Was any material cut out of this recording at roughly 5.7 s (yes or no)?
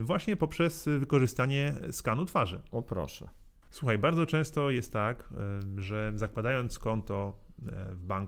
no